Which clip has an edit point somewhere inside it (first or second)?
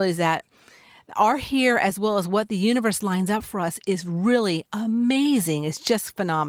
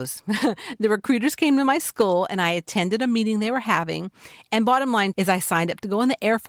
second